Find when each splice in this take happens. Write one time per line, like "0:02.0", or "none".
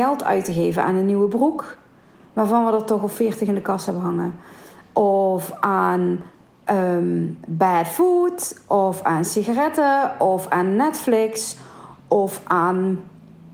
none